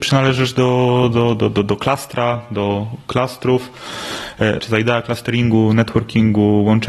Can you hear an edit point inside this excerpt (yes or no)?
yes